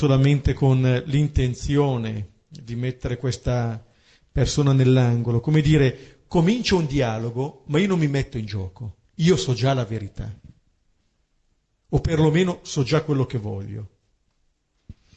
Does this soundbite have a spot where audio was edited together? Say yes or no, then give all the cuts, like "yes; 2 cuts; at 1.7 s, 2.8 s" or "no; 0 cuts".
yes; 1 cut; at 9.0 s